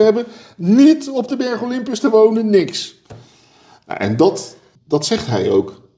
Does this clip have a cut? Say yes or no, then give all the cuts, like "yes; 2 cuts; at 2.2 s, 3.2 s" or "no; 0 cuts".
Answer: yes; 1 cut; at 4.8 s